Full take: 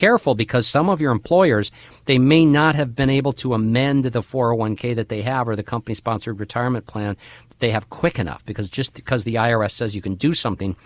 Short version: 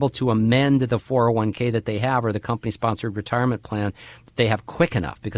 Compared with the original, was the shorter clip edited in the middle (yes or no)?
no